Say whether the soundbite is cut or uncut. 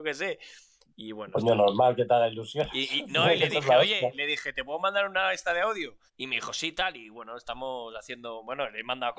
cut